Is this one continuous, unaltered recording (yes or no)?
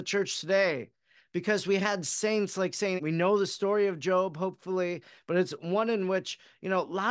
no